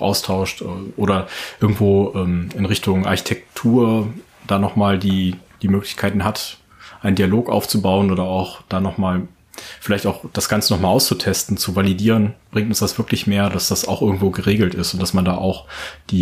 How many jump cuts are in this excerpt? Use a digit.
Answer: 0